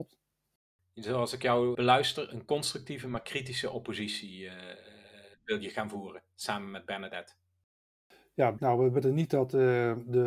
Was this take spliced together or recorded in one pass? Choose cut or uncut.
cut